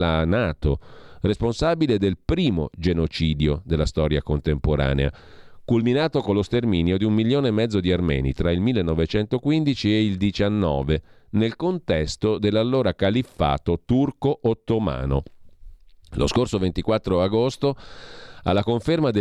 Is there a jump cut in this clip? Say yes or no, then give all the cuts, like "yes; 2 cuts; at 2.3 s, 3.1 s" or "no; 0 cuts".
no; 0 cuts